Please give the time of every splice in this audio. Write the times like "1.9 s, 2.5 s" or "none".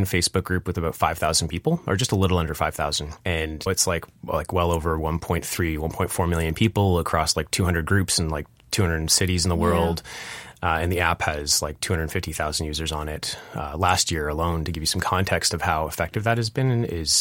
3.7 s